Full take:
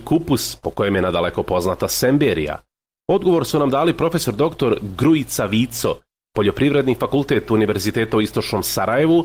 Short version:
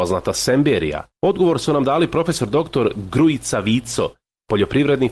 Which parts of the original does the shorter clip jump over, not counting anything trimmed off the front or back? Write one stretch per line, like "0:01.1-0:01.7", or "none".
0:02.7-0:03.0